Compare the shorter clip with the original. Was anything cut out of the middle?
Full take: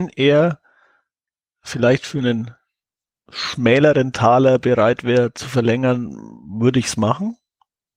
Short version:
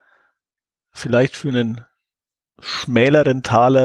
no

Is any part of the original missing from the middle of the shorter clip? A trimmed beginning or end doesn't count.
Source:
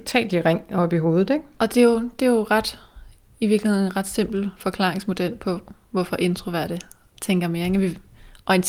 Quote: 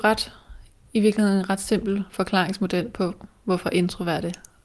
no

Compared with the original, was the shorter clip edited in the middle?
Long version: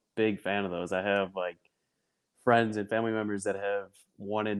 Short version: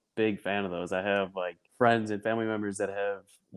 yes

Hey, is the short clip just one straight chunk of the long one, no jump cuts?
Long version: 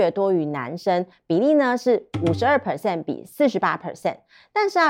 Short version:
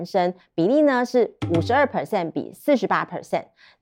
yes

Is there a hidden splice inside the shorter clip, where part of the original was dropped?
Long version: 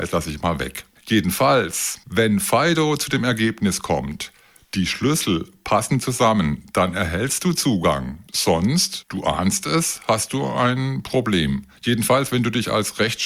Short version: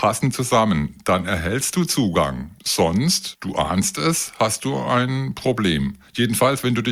no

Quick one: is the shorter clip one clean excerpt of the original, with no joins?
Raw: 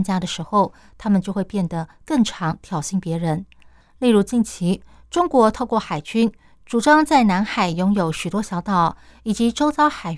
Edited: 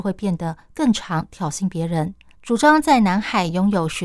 no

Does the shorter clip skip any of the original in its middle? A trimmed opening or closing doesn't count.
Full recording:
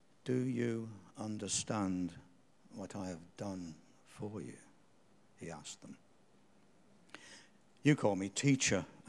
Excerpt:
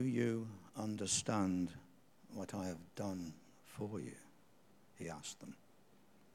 no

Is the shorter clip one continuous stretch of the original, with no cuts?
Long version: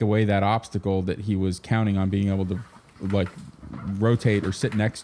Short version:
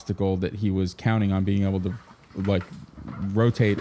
yes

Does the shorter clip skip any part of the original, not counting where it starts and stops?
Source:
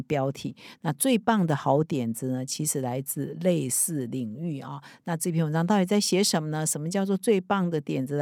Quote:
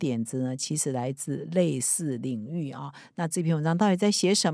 no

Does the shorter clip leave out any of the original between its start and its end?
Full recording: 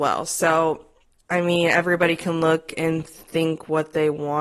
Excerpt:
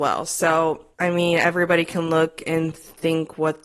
yes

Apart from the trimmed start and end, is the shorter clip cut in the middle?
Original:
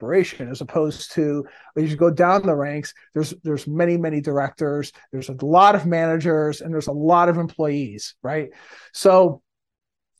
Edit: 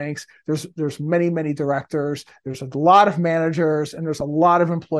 no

